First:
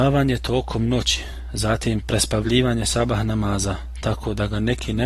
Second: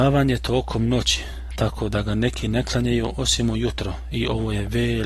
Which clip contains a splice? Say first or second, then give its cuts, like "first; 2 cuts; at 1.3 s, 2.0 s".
second; 1 cut; at 1.5 s